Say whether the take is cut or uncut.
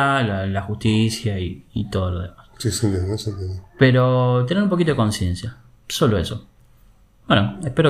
uncut